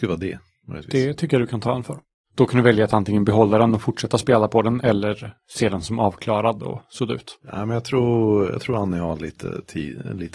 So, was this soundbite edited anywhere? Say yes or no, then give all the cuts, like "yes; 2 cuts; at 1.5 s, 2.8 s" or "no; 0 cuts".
no; 0 cuts